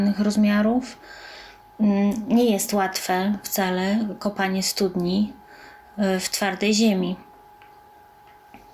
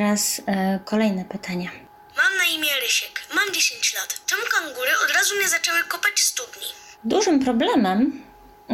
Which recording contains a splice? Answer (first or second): second